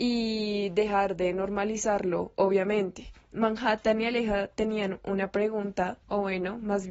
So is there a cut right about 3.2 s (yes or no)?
no